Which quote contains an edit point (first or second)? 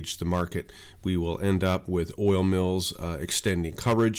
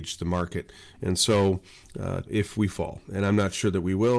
second